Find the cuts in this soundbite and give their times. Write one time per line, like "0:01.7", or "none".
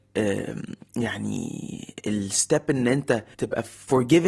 0:03.3